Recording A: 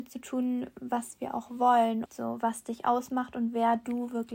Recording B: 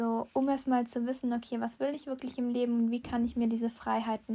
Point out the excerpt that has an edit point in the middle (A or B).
A